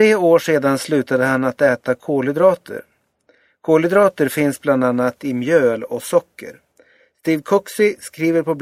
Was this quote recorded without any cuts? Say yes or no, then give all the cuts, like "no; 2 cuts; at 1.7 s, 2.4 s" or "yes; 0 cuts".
yes; 0 cuts